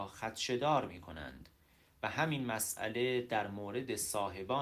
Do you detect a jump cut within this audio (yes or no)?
no